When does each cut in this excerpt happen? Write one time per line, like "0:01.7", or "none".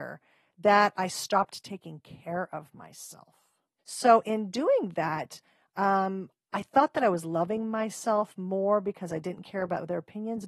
0:03.8